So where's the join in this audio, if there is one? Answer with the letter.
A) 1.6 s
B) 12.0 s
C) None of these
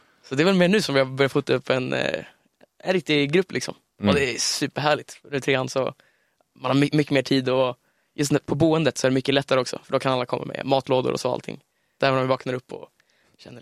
B